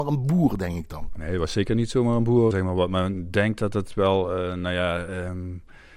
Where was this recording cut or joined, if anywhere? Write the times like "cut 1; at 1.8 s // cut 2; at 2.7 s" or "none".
cut 1; at 2.5 s